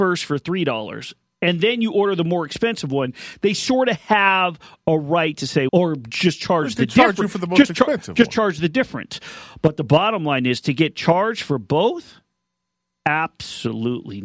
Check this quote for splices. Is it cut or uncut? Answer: cut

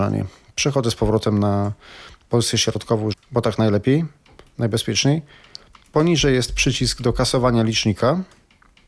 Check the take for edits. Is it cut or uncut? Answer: cut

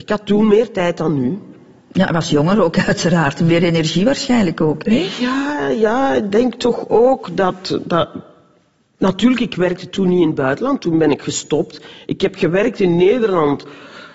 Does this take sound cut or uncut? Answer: uncut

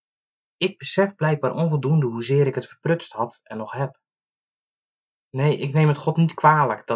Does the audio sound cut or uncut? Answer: uncut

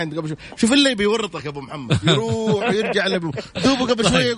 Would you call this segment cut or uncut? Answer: uncut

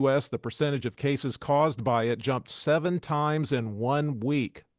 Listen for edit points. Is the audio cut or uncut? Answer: uncut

